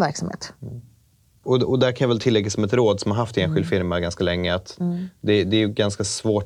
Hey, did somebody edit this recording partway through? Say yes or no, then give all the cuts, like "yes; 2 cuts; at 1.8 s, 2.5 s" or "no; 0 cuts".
no; 0 cuts